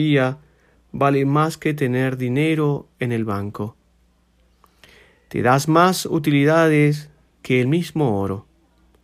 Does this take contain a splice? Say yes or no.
no